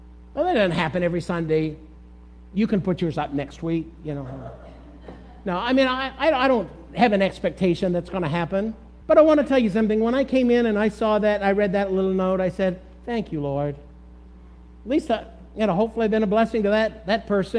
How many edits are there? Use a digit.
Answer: 1